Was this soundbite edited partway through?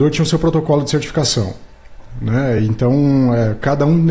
no; 0 cuts

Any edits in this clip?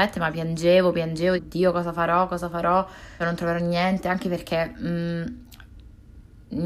yes; 2 cuts; at 1.4 s, 3.2 s

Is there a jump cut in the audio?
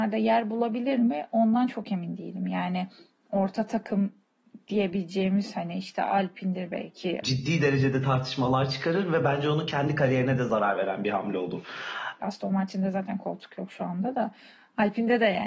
yes; 2 cuts; at 7.2 s, 12.2 s

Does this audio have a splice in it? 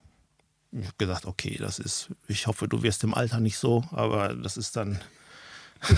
no; 0 cuts

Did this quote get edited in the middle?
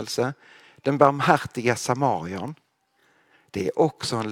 no; 0 cuts

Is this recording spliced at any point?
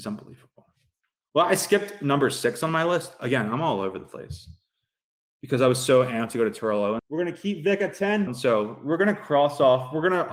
yes; 2 cuts; at 7.0 s, 8.3 s

